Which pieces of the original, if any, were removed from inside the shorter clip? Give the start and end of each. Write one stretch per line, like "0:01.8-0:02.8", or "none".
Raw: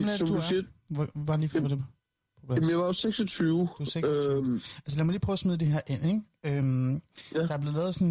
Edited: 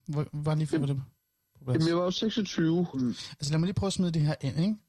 0:03.8-0:04.4